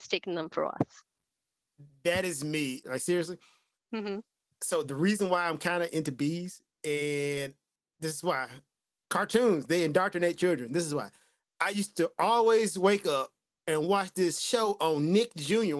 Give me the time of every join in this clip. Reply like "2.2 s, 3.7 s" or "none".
2.8 s